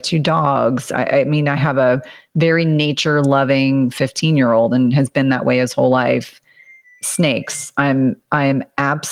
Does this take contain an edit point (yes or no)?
no